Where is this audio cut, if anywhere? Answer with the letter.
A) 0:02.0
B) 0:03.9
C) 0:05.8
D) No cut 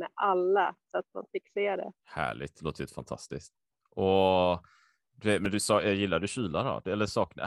A